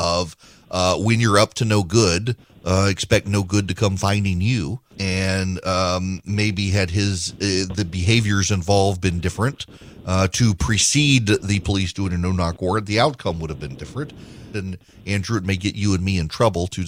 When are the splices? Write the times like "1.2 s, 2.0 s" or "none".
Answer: 4.9 s, 14.5 s